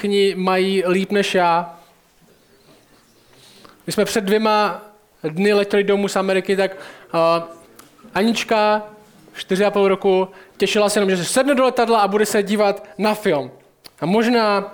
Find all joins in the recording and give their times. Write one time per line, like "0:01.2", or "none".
0:13.8

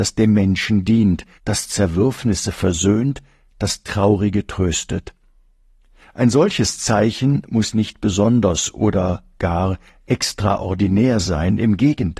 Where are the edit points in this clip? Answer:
0:01.4

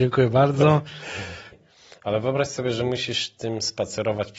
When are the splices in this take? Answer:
0:01.5

